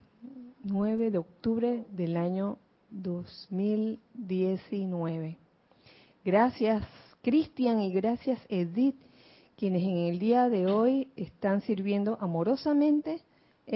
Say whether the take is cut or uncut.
uncut